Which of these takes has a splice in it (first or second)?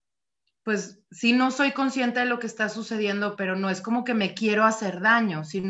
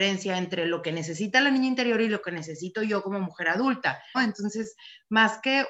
second